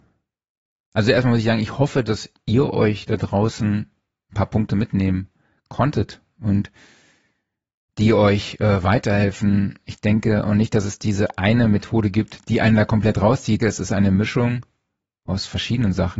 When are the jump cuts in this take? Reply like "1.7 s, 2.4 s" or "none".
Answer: 12.5 s, 13.6 s